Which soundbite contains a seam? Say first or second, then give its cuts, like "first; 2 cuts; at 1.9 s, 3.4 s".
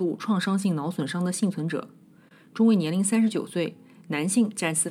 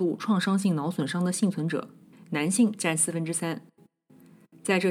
second; 1 cut; at 2.1 s